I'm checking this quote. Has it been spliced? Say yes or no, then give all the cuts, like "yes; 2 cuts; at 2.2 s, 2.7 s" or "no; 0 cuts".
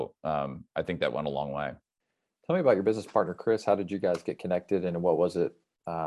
no; 0 cuts